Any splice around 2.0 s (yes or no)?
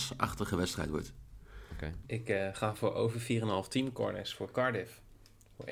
yes